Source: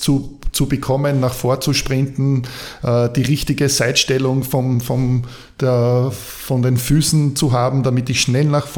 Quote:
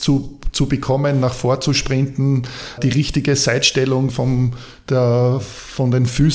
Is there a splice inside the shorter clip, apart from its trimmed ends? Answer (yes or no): yes